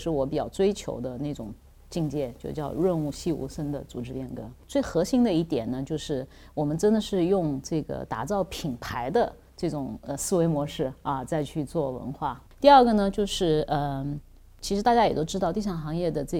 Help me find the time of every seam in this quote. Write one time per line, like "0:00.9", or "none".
0:12.5